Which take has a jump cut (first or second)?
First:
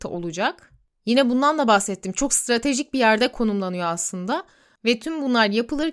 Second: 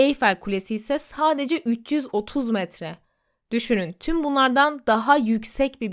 first